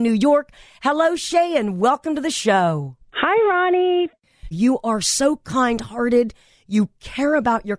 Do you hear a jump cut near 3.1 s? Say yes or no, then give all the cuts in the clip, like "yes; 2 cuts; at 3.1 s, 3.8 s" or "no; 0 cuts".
yes; 2 cuts; at 3.1 s, 4.5 s